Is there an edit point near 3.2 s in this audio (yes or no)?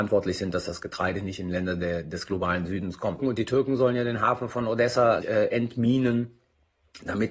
yes